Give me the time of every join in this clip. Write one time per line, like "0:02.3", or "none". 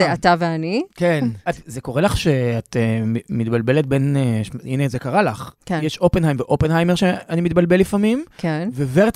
0:01.5